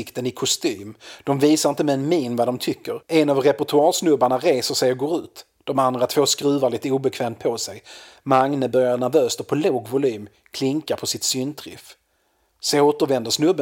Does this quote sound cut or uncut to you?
uncut